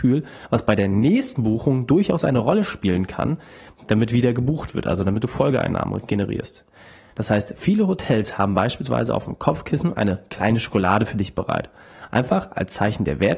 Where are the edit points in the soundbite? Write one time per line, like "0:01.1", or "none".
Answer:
0:07.1